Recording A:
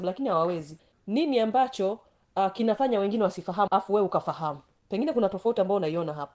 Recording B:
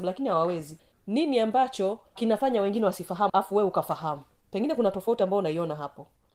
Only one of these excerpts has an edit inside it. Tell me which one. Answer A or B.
B